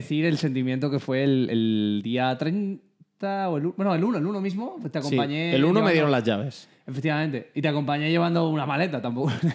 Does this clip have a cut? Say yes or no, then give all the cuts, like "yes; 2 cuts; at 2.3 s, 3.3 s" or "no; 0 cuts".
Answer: no; 0 cuts